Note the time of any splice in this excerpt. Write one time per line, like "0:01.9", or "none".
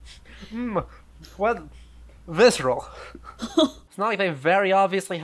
0:01.2
0:03.4